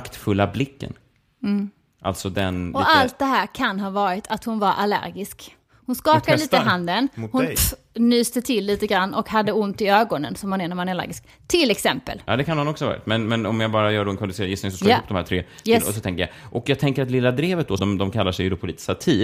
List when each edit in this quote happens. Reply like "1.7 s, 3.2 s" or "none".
17.8 s